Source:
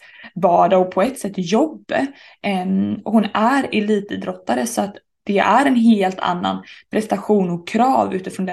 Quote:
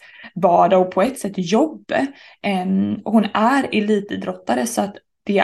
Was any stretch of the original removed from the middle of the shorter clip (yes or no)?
no